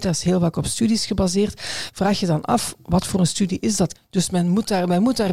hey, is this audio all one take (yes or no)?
no